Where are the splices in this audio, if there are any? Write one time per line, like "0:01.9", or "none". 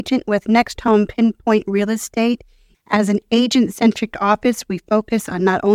0:02.7